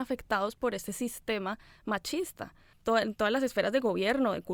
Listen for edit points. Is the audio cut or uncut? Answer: uncut